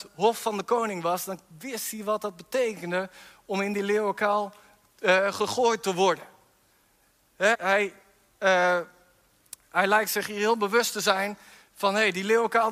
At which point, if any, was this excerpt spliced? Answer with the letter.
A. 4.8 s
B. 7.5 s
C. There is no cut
B